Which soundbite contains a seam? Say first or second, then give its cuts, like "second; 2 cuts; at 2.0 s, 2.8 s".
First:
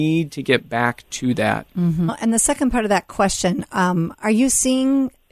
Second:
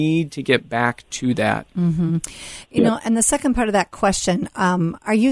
first; 1 cut; at 2.1 s